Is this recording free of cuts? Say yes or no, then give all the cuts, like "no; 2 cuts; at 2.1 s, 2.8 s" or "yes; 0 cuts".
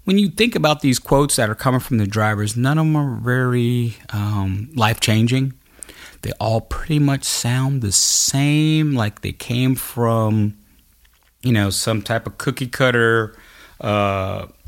yes; 0 cuts